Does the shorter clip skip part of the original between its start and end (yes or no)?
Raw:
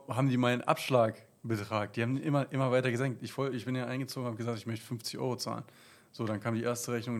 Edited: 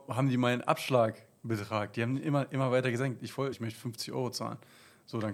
yes